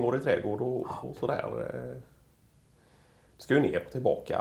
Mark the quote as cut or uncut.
uncut